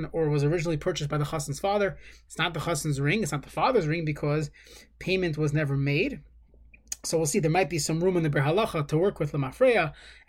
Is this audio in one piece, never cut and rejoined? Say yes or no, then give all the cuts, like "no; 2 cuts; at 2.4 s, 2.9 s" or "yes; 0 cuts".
no; 1 cut; at 2.3 s